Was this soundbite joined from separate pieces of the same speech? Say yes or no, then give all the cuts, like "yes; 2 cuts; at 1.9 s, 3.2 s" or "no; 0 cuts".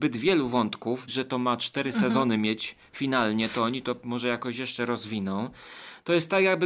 yes; 1 cut; at 1.1 s